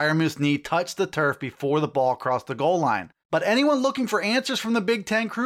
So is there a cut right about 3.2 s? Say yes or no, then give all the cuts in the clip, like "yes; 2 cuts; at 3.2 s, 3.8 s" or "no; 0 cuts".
yes; 1 cut; at 3.2 s